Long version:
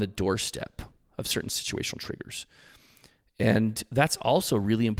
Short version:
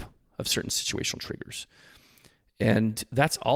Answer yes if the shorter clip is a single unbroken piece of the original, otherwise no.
yes